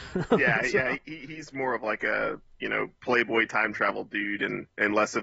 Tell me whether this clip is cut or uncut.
cut